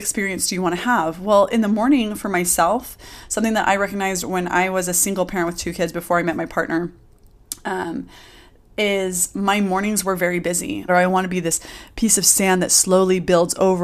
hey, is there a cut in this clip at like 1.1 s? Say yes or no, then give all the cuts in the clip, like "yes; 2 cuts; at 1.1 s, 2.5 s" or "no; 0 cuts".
no; 1 cut; at 10.9 s